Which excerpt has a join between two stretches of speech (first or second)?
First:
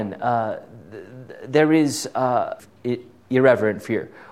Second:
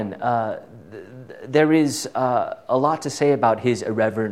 first